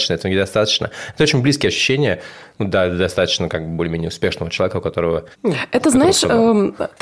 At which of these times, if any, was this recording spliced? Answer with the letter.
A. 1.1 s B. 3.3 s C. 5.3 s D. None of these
C